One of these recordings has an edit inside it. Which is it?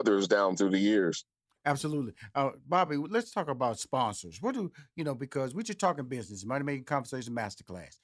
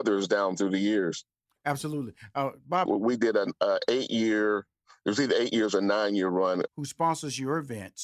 second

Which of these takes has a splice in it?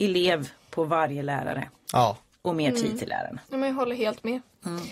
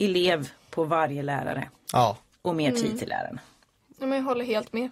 first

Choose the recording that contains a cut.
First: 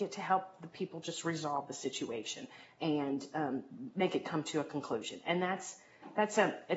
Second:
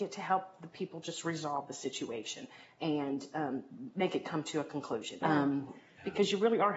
second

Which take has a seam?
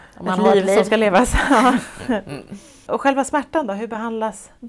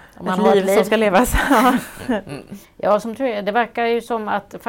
second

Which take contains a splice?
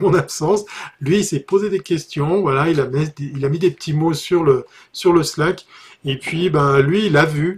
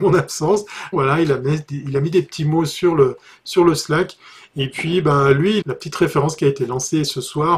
second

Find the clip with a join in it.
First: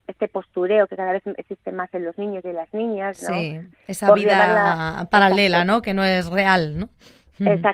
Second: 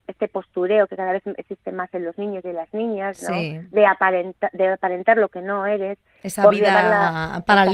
first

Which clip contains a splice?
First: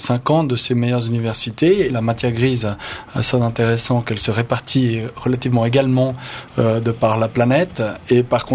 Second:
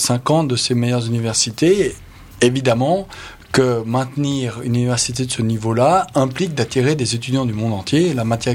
first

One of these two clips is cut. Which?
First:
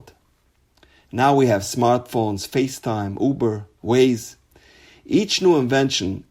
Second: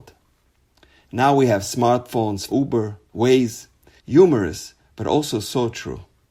second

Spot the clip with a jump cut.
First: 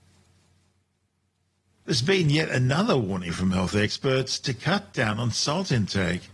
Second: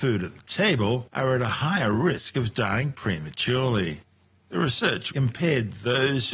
second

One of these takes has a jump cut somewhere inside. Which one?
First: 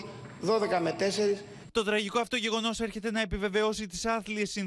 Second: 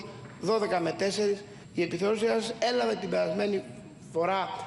first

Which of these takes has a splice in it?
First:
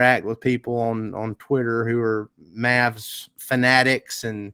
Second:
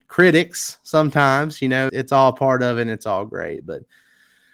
second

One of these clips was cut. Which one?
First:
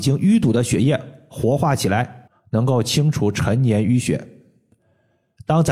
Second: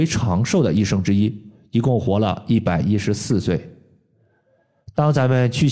first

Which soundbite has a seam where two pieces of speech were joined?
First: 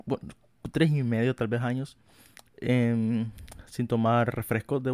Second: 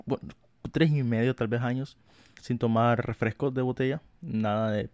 second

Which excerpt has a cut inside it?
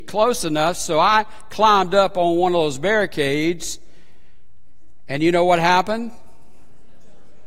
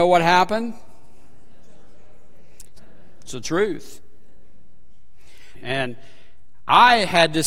second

